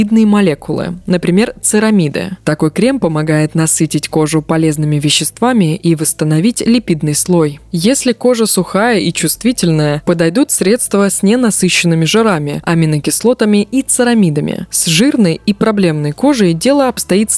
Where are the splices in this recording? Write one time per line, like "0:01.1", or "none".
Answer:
none